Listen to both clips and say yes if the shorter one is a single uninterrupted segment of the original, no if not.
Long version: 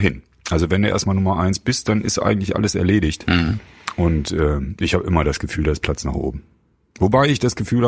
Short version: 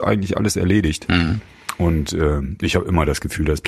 yes